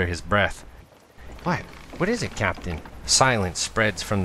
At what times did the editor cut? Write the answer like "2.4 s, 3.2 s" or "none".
1.4 s, 3.0 s